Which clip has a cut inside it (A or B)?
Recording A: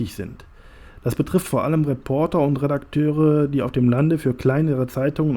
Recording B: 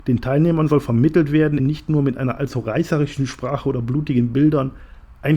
B